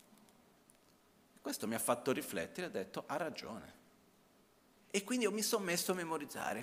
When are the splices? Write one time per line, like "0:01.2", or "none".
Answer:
none